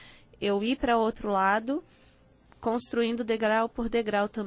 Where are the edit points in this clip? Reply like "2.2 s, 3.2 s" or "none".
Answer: none